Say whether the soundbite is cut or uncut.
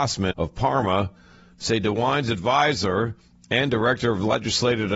uncut